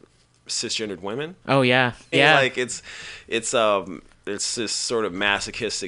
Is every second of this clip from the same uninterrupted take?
no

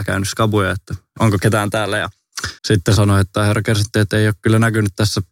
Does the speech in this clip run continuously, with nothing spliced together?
no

